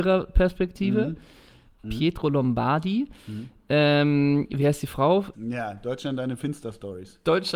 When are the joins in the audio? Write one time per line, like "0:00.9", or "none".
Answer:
0:01.8
0:05.3